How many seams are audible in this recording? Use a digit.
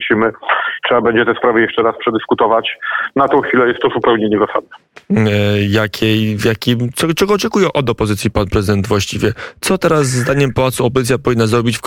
0